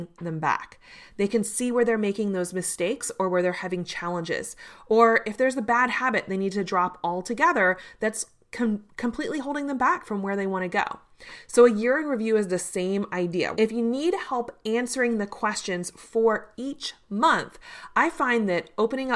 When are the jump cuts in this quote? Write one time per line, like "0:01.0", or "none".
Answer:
0:13.5

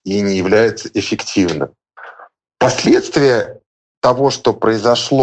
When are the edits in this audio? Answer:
none

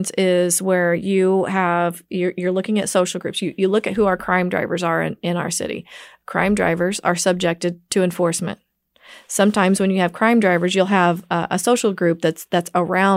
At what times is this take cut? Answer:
none

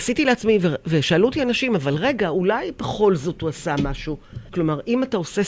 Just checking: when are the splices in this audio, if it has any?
0:04.5

